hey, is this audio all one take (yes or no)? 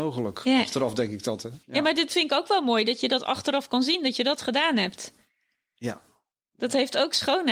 yes